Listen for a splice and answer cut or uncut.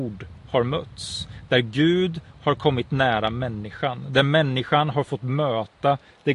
uncut